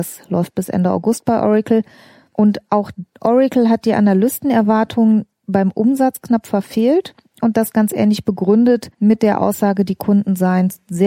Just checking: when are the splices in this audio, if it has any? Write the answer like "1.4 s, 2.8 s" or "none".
8.9 s